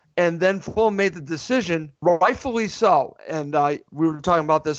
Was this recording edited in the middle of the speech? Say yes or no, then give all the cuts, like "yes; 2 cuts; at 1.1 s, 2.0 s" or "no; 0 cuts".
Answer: yes; 2 cuts; at 2.0 s, 3.2 s